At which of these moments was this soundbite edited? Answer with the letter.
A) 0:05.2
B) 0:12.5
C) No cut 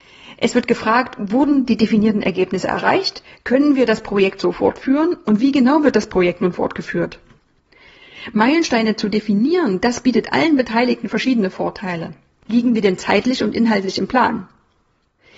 B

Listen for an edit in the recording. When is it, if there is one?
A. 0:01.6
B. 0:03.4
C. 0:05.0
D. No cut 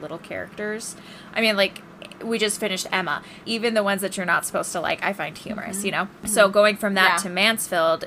B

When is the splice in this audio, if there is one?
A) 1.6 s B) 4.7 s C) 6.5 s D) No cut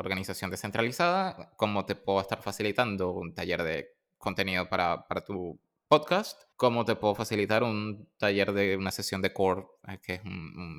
C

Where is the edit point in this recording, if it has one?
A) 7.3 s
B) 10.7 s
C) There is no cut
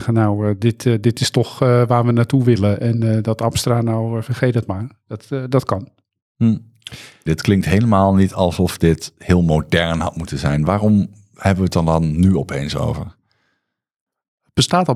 A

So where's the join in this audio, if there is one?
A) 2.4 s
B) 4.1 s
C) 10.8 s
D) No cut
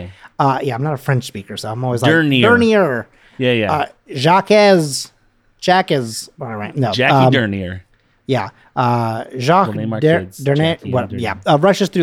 D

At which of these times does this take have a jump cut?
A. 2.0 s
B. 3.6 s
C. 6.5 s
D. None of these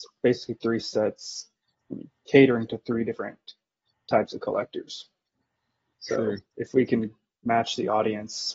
C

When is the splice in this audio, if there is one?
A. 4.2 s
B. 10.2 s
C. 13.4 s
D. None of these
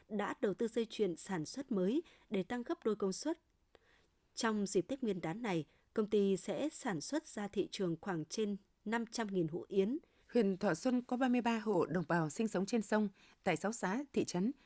B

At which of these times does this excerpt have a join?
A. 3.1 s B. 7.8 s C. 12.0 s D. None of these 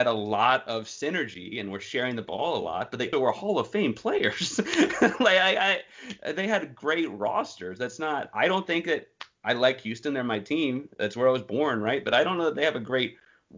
A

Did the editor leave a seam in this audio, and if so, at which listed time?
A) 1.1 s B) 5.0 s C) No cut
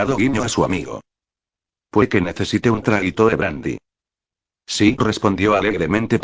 B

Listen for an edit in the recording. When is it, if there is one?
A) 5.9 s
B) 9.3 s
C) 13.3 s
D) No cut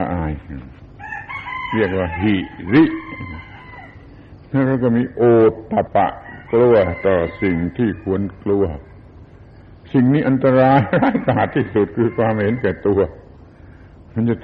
A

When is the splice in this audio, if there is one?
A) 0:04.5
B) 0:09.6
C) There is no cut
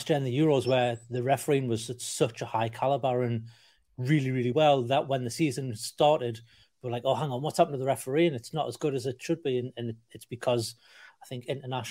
C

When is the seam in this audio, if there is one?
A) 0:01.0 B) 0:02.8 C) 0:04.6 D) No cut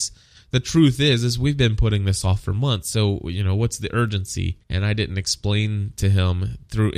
C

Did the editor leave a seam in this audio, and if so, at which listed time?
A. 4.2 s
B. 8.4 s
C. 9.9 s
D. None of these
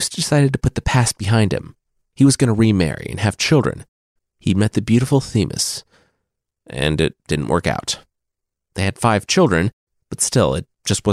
A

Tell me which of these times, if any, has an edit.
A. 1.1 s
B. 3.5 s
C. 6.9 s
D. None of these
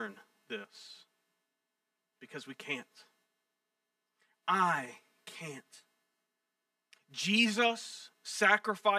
C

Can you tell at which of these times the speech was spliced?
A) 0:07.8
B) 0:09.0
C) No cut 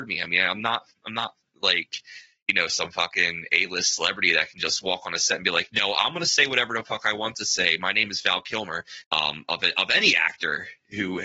B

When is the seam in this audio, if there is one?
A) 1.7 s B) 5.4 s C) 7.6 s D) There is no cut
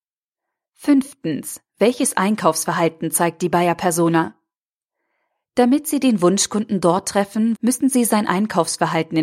C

